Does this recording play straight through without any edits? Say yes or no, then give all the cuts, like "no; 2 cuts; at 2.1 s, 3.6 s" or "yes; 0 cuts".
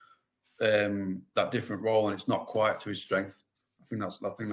yes; 0 cuts